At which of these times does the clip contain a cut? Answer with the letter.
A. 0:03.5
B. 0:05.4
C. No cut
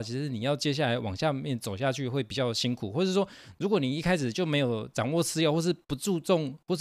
C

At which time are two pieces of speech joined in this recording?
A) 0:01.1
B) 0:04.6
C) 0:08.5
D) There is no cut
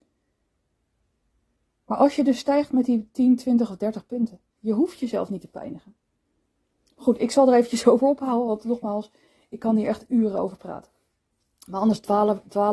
B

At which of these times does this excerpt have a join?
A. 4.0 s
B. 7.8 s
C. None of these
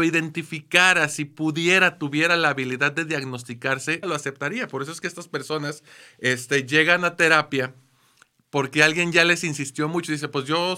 A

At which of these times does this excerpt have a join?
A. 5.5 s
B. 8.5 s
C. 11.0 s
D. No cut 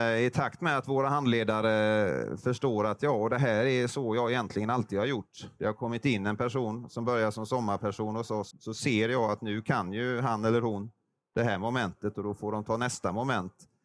B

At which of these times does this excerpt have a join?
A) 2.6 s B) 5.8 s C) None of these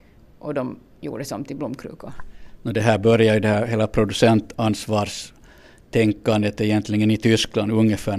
C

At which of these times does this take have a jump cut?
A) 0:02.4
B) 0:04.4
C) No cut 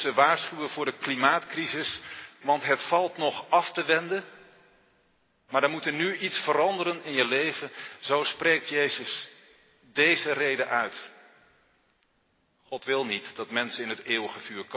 A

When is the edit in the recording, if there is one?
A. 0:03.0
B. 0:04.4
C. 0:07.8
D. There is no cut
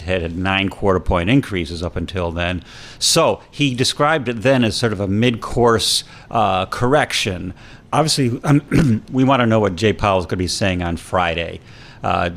C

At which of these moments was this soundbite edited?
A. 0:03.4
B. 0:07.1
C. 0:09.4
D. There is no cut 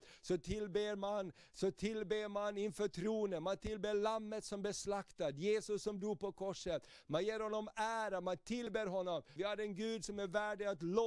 C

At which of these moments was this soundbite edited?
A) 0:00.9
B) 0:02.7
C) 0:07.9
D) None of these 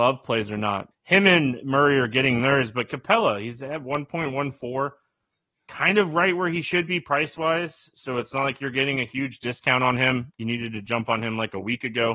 A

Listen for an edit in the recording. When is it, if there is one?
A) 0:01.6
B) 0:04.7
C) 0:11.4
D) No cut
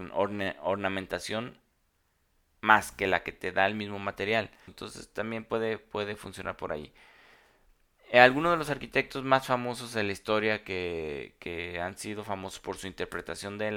B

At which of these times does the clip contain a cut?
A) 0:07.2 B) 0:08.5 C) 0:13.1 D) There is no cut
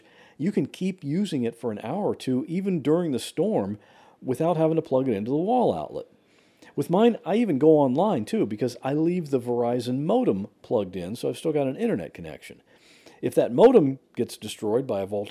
D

